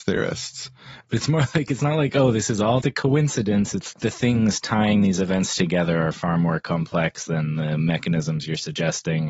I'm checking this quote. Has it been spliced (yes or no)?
yes